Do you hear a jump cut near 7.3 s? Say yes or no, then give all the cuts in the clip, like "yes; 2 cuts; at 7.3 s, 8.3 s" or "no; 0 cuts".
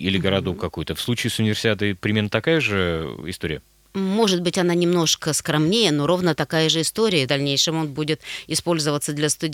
yes; 1 cut; at 7.3 s